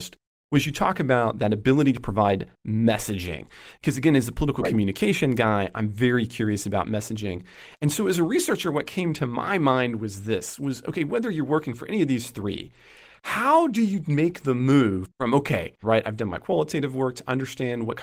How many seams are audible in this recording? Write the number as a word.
one